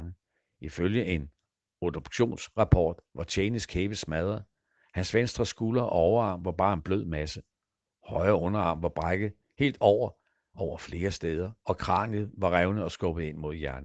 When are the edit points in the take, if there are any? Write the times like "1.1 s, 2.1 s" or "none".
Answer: none